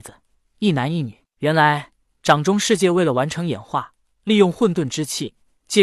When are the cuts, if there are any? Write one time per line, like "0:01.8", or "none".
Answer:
none